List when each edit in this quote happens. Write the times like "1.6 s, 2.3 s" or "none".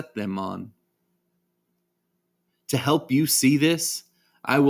none